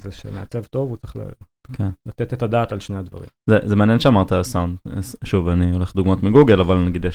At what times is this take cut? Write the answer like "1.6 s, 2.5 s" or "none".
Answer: none